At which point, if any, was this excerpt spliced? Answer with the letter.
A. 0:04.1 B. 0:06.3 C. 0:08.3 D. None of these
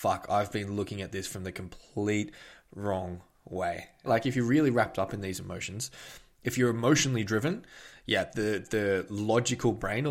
A